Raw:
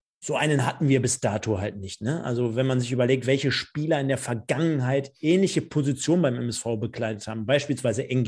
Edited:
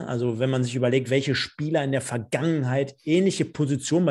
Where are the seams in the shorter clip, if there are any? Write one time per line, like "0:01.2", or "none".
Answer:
none